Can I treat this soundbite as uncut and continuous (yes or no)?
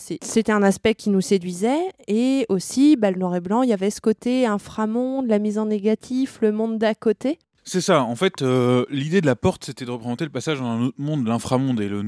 yes